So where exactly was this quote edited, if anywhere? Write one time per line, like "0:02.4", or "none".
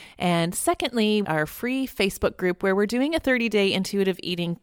0:01.2